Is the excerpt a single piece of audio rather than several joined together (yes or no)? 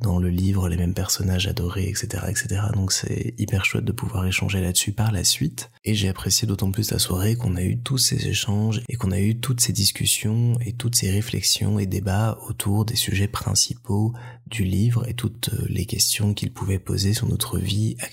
yes